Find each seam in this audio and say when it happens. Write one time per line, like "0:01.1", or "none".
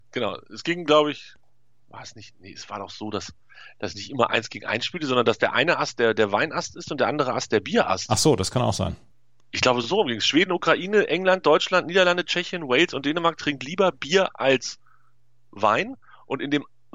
none